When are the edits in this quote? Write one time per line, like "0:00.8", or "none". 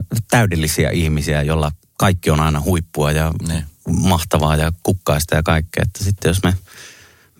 none